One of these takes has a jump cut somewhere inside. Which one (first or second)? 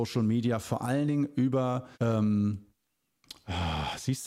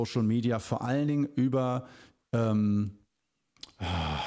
first